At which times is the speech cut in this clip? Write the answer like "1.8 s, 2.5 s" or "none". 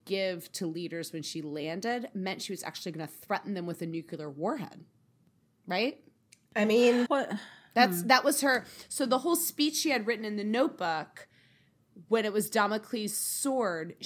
7.1 s